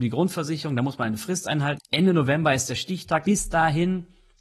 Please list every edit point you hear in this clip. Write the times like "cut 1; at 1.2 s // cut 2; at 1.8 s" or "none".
cut 1; at 1.8 s // cut 2; at 3.2 s

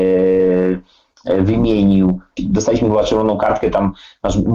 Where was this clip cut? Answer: cut 1; at 2.4 s

